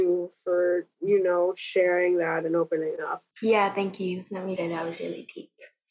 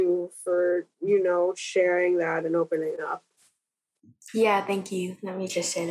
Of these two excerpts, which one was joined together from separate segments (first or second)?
first